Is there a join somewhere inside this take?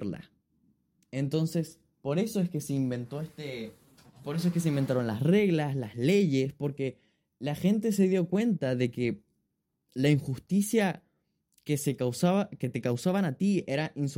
yes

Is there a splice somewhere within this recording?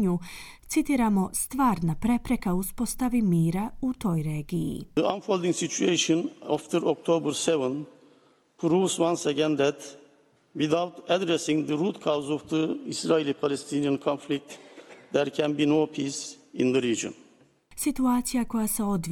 no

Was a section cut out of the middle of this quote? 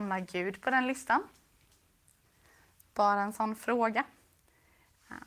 no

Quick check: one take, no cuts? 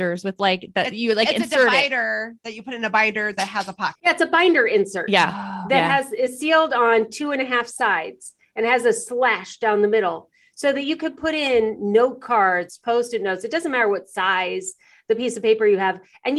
no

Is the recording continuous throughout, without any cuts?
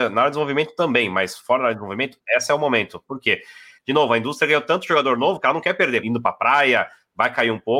no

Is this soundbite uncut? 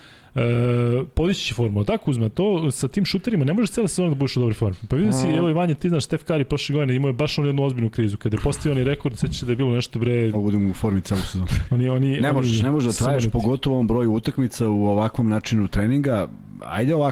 no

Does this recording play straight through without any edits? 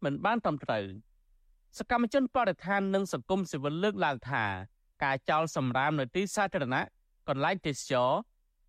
yes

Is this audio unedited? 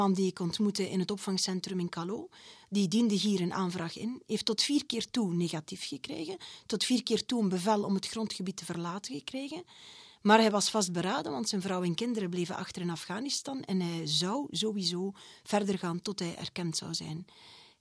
yes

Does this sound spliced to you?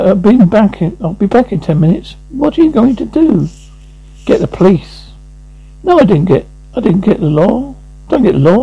no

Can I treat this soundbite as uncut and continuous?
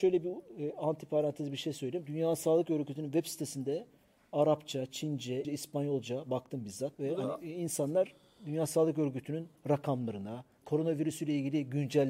no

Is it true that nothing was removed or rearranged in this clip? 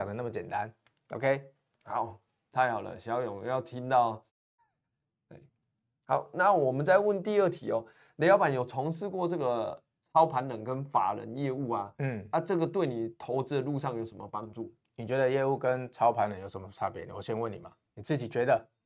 yes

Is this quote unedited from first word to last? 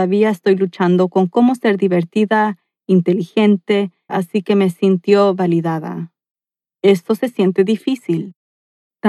no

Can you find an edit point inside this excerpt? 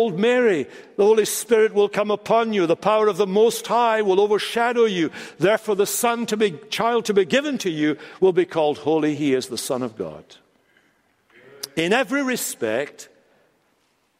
no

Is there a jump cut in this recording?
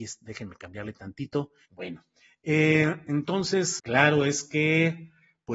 yes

